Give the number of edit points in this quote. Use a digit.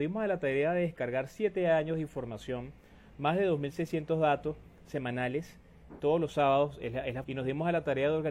2